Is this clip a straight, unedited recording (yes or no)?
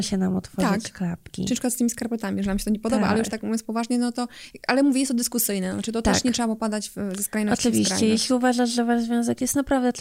yes